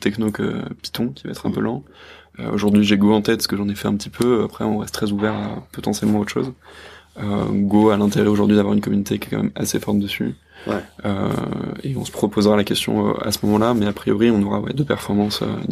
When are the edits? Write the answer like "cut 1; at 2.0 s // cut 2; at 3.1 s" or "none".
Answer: cut 1; at 14.7 s